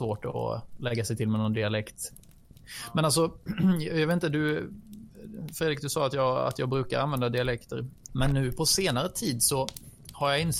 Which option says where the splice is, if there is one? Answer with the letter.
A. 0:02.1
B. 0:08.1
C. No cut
B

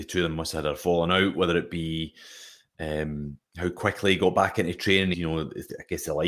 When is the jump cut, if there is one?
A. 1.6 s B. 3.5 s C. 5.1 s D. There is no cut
C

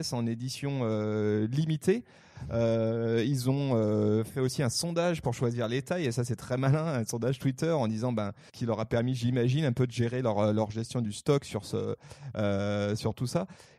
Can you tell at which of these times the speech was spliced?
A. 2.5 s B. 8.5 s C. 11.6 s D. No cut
B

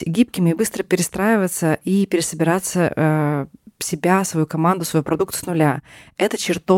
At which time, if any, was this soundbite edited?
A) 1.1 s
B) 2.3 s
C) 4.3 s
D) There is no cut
D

